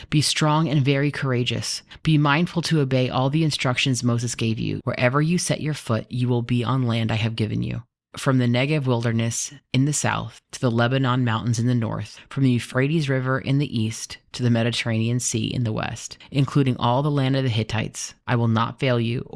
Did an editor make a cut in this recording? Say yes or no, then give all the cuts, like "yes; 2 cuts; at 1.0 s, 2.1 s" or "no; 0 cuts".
yes; 2 cuts; at 4.8 s, 18.2 s